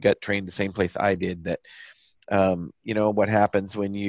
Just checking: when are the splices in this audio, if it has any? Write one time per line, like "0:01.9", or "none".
none

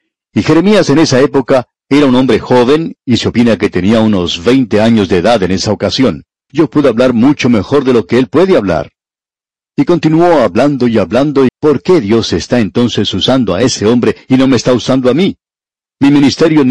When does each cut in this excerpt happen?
0:06.5
0:11.5

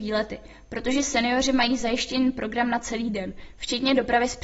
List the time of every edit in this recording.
none

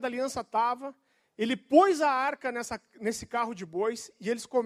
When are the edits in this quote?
none

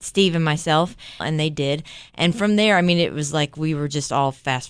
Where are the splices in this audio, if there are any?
0:01.2

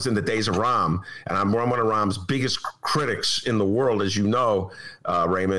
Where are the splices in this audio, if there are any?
none

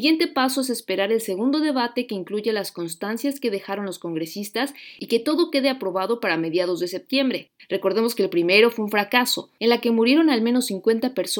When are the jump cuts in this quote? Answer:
0:07.6
0:09.6

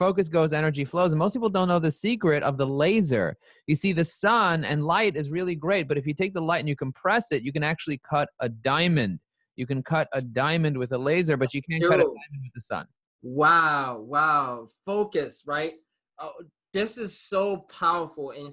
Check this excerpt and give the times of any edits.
none

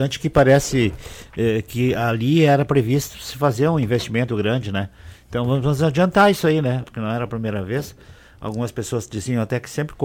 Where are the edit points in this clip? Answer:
0:04.3
0:06.8

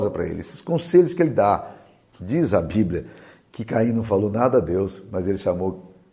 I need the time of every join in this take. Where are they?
none

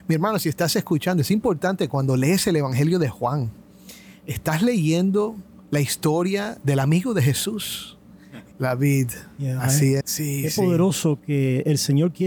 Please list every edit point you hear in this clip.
0:08.5
0:10.0

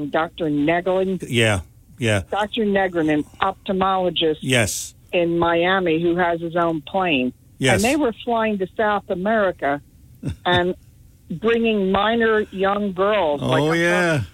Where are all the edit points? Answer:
0:01.2

